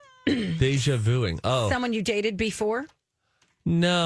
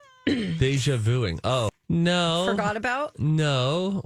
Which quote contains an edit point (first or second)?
second